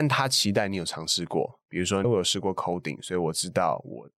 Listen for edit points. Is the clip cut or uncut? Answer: cut